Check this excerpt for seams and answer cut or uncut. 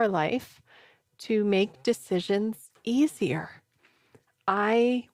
uncut